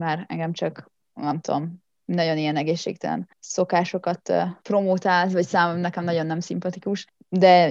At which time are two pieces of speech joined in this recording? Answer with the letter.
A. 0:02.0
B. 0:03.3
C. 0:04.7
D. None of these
B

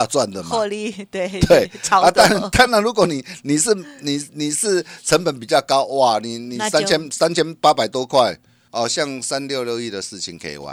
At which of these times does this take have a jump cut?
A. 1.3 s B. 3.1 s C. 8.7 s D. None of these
C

